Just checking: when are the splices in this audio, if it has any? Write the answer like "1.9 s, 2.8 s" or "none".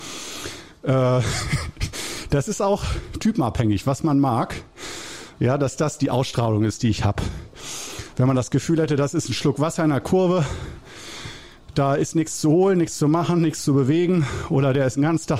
5.4 s